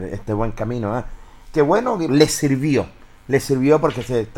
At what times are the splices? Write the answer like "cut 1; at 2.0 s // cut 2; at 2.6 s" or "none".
cut 1; at 2.1 s